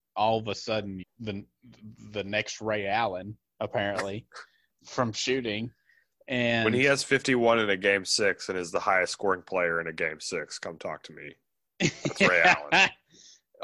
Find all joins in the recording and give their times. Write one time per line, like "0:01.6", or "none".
0:01.0